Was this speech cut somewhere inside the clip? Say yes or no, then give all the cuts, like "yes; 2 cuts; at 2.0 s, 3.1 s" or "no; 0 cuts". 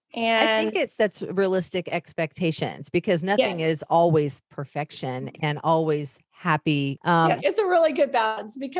yes; 1 cut; at 7.4 s